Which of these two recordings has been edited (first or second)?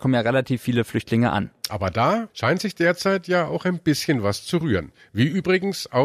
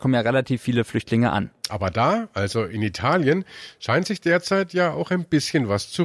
first